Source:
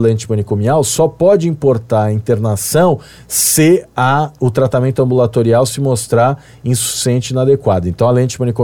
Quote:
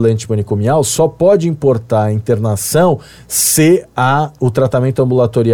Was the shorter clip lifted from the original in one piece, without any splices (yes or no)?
yes